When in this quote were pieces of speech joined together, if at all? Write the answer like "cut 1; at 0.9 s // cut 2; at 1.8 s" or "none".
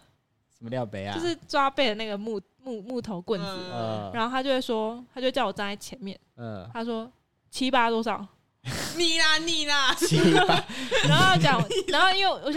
none